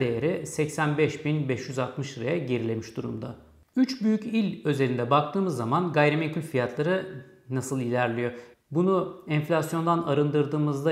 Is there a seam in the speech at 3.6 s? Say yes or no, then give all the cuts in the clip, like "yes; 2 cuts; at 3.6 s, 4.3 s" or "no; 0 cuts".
no; 1 cut; at 8.5 s